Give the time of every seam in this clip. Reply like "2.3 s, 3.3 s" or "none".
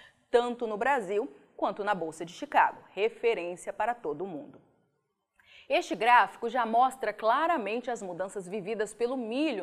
none